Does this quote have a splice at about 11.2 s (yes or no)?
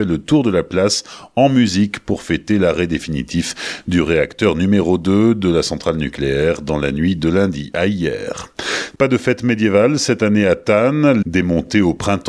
yes